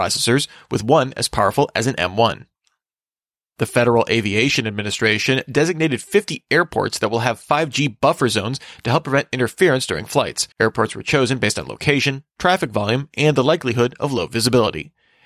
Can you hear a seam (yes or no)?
yes